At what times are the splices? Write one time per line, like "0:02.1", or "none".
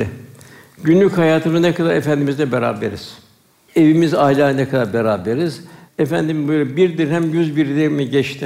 0:03.7
0:05.9